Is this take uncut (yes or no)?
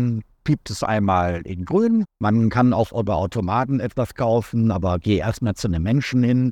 no